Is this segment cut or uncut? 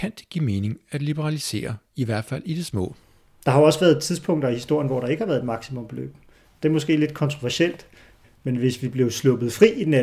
uncut